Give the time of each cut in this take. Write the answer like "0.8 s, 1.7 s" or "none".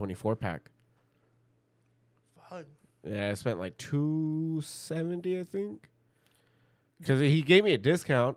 none